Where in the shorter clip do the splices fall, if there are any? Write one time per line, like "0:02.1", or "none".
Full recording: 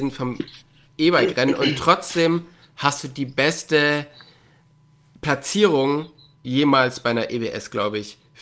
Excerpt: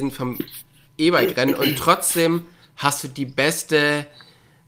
none